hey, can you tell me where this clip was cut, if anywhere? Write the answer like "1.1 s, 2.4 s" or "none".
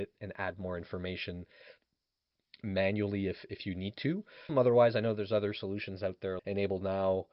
4.5 s, 6.4 s